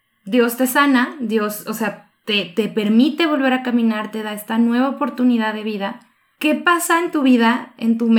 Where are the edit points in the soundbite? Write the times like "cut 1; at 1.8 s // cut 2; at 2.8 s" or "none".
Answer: none